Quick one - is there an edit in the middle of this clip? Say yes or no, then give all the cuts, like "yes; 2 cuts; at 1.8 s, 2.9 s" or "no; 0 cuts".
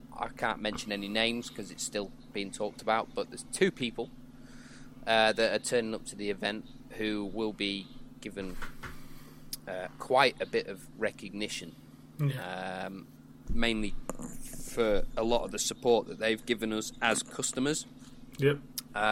no; 0 cuts